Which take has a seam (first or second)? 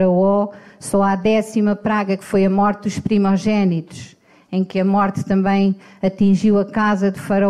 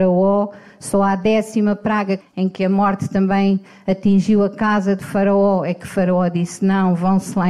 second